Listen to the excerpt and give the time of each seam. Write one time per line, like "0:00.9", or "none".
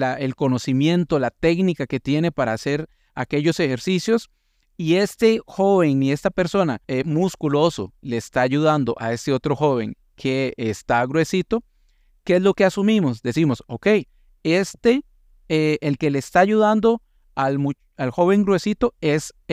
0:06.8